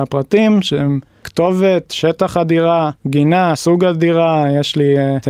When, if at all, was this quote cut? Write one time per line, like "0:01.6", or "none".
0:02.9